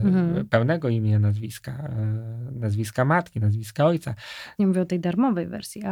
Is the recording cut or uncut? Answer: cut